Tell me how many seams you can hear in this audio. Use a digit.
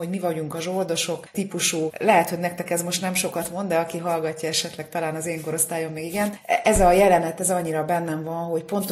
0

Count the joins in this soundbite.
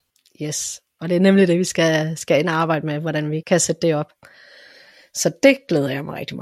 1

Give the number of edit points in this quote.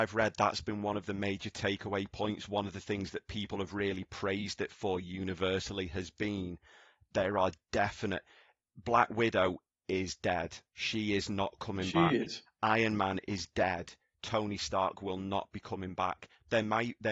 0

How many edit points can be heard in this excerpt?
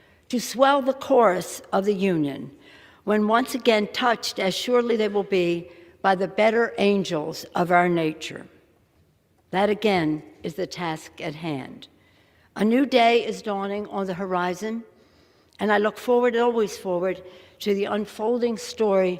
0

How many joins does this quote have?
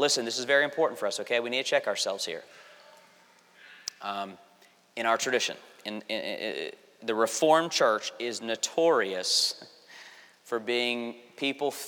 0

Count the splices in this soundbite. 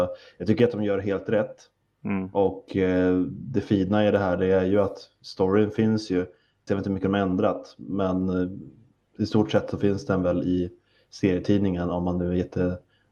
1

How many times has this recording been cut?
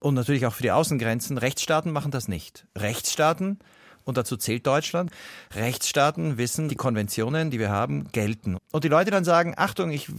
2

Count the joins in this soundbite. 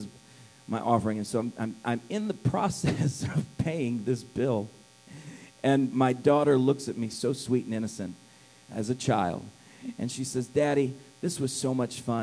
0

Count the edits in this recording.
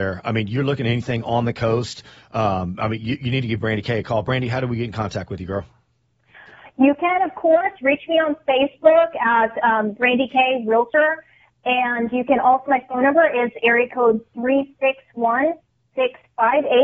1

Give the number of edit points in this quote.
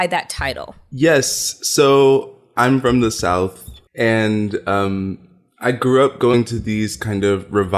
1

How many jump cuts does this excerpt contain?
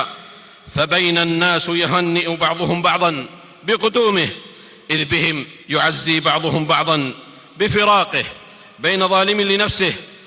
1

